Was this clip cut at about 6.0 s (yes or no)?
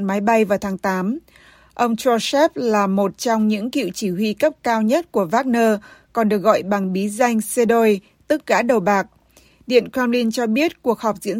no